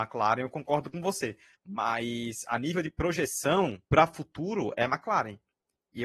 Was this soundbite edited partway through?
yes; 2 cuts; at 1.5 s, 3.8 s

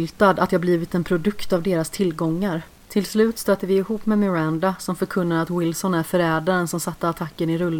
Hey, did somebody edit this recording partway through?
yes; 1 cut; at 2.8 s

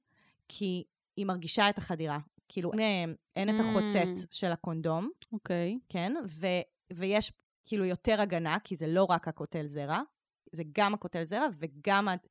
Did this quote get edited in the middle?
yes; 1 cut; at 2.7 s

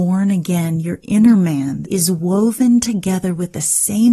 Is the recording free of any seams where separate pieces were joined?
no; 1 cut; at 1.8 s

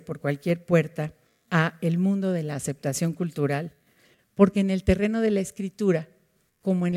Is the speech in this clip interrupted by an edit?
no; 0 cuts

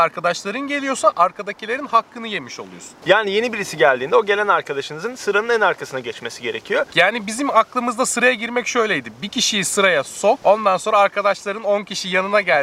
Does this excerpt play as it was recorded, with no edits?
no; 1 cut; at 6.9 s

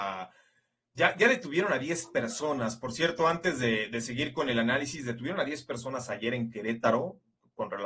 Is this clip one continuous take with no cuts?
yes; 0 cuts

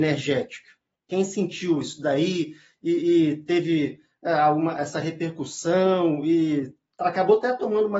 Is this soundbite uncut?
no; 1 cut; at 0.9 s

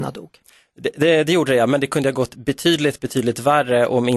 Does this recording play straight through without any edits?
yes; 0 cuts

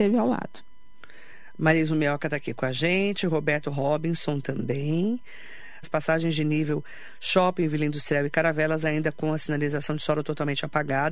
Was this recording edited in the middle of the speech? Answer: yes; 1 cut; at 5.8 s

